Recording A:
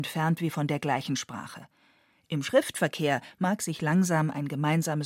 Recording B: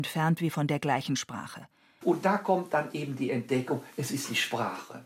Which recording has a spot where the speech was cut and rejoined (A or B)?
B